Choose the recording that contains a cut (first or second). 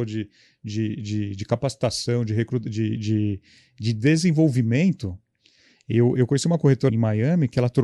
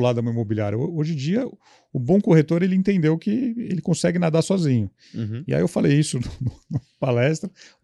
first